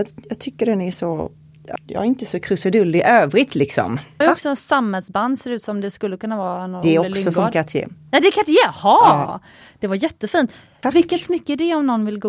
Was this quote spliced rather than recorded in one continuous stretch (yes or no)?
yes